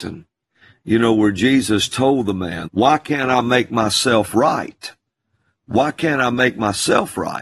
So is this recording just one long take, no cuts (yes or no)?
no